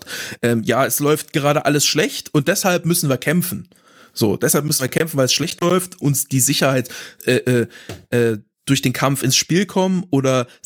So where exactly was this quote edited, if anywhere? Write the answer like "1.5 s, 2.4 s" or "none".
6.0 s, 7.2 s